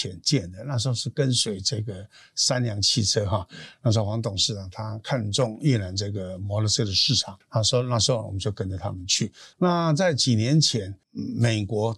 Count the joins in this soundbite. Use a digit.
1